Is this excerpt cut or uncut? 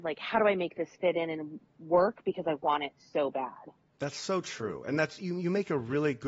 uncut